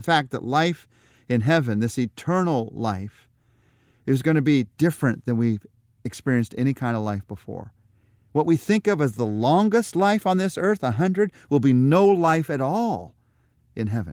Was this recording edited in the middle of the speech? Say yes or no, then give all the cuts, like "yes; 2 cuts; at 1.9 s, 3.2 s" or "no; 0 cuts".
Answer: no; 0 cuts